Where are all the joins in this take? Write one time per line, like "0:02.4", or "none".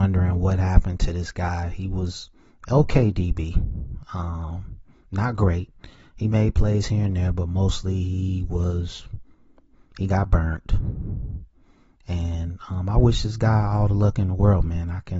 none